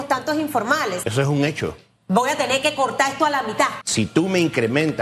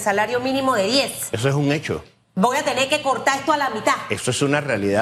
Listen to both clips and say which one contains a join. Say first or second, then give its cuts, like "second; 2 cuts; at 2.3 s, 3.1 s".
first; 2 cuts; at 1.0 s, 3.8 s